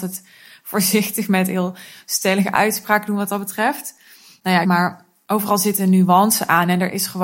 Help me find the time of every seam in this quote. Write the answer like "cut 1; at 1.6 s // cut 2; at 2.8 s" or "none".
cut 1; at 4.6 s